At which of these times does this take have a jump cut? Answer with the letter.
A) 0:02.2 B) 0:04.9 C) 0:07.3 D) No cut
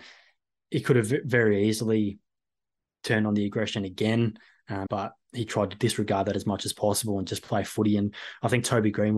B